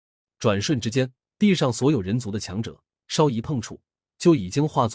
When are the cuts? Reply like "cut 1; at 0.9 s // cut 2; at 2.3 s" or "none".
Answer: cut 1; at 1.3 s